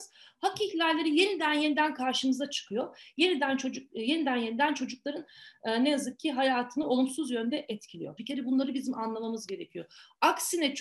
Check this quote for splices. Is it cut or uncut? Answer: cut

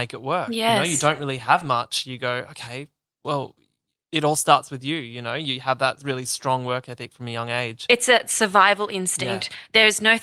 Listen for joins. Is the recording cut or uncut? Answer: uncut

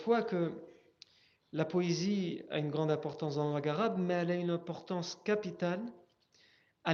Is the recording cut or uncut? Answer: uncut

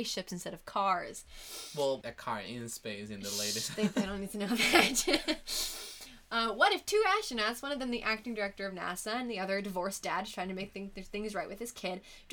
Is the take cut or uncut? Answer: cut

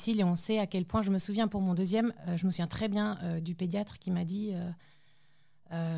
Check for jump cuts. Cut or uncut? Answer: uncut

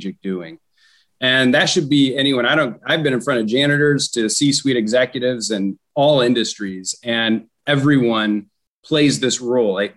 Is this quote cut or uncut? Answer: uncut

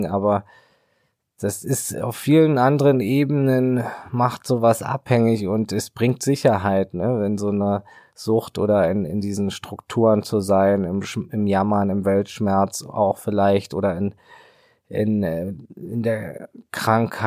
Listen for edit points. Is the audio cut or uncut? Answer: uncut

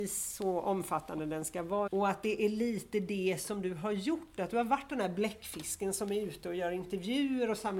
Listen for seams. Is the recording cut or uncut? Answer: cut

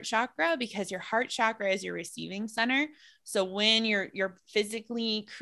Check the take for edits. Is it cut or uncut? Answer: uncut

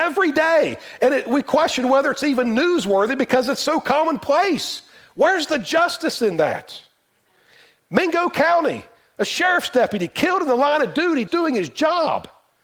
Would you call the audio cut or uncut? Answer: cut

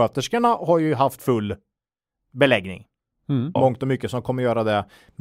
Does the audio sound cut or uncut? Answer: cut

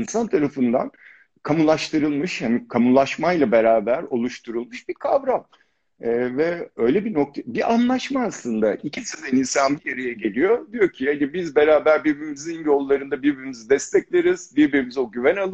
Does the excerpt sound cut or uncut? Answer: uncut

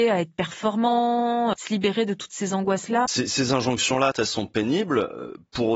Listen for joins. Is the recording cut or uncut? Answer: cut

